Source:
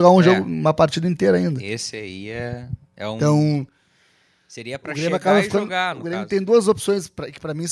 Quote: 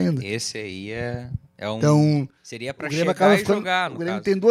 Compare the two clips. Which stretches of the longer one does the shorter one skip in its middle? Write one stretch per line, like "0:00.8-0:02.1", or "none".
0:03.8-0:04.4